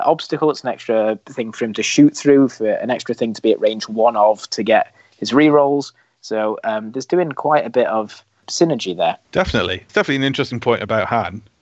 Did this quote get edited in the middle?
yes; 1 cut; at 9.2 s

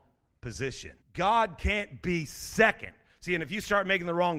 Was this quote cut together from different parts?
yes; 1 cut; at 1.0 s

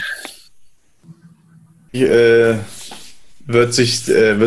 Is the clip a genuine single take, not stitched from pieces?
no; 1 cut; at 1.9 s

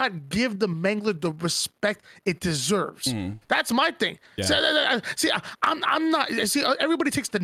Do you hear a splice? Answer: no; 0 cuts

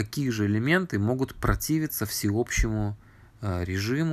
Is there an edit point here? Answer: no; 0 cuts

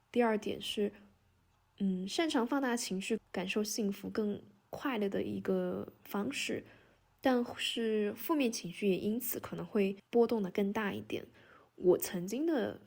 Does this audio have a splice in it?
yes; 1 cut; at 3.2 s

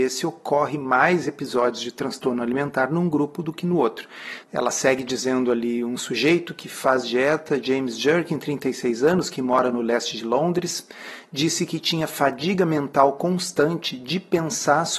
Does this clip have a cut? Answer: yes; 1 cut; at 4.4 s

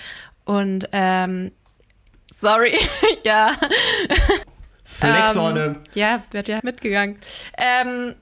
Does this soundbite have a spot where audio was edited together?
yes; 2 cuts; at 4.4 s, 6.6 s

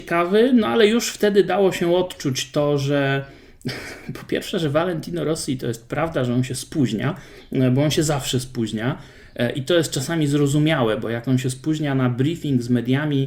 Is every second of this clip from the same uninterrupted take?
yes; 0 cuts

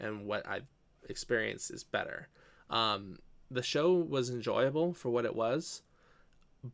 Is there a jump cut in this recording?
yes; 1 cut; at 2.6 s

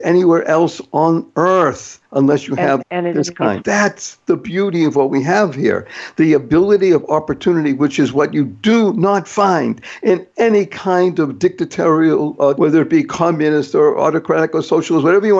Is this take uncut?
no; 2 cuts; at 3.6 s, 12.5 s

